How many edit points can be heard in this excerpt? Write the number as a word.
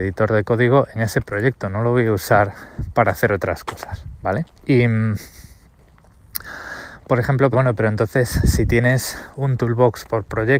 two